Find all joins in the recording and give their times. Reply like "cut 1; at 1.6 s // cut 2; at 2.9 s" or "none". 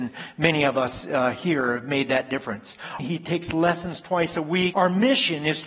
cut 1; at 3.0 s // cut 2; at 4.7 s